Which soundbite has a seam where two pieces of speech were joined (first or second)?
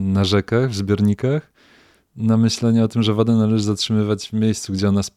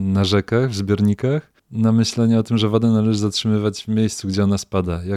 second